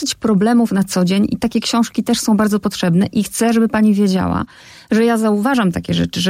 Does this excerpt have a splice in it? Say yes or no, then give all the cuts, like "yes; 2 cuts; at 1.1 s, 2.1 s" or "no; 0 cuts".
no; 0 cuts